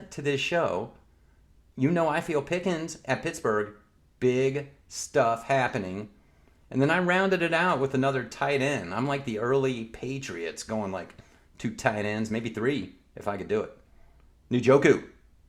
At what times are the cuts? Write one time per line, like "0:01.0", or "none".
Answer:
none